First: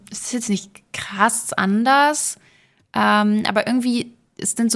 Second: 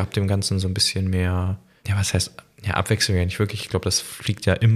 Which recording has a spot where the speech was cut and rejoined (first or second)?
second